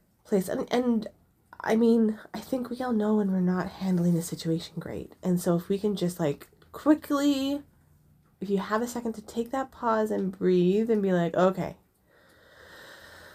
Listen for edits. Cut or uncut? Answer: uncut